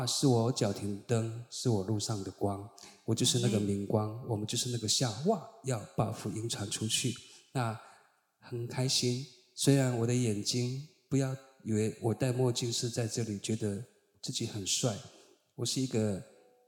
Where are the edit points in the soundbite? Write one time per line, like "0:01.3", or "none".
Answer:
none

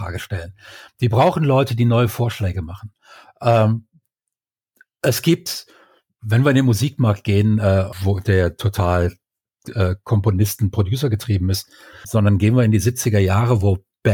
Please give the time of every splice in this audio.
0:07.9
0:12.0

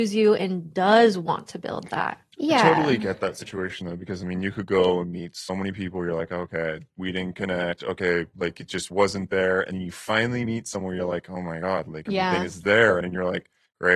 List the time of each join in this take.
0:13.0

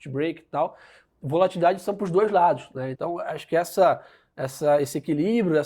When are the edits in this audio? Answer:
0:02.9

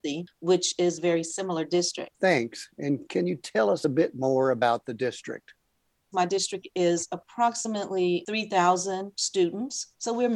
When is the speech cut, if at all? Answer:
0:02.1

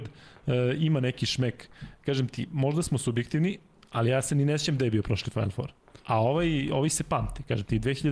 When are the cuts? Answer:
0:06.0

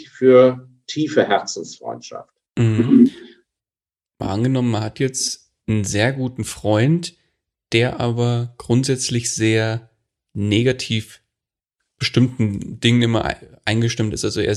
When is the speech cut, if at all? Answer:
0:02.5

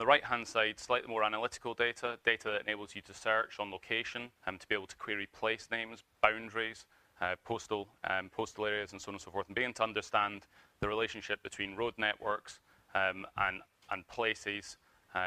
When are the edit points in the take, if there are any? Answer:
0:04.4

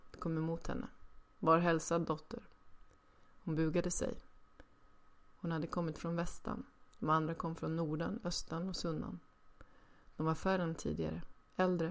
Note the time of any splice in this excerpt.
none

